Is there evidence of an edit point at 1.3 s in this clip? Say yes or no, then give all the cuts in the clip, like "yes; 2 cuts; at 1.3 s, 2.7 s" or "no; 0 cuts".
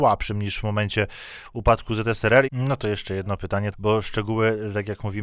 no; 2 cuts; at 2.5 s, 3.7 s